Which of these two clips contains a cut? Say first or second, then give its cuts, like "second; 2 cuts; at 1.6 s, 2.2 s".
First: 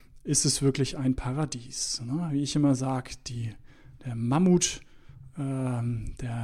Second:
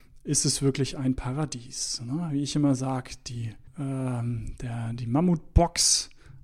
second; 1 cut; at 3.7 s